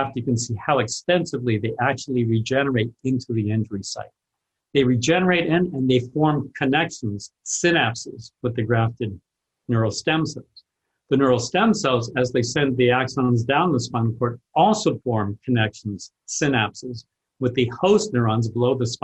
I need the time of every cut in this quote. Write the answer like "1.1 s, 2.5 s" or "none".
none